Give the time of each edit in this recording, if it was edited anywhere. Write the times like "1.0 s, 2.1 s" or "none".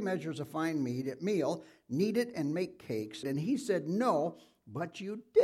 3.2 s